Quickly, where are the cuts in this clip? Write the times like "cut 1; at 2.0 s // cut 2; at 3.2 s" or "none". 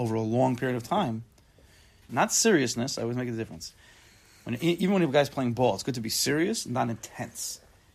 cut 1; at 2.1 s

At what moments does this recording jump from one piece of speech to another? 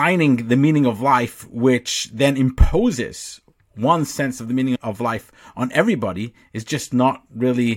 none

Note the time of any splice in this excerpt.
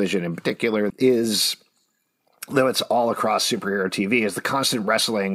cut 1; at 0.9 s

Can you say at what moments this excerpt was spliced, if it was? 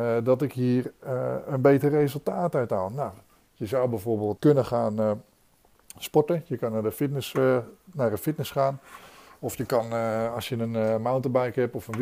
cut 1; at 4.4 s

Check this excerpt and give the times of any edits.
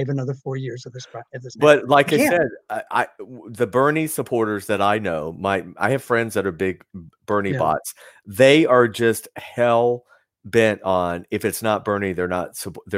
none

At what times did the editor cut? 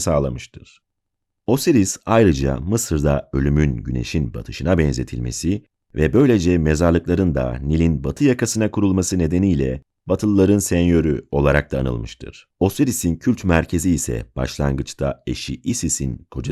cut 1; at 12.5 s

